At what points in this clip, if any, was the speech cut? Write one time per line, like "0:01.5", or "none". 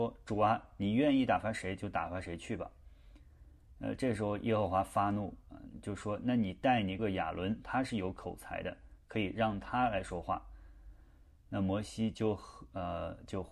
0:07.0